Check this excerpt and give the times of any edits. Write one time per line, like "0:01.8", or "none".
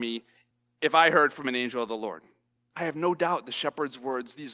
0:02.7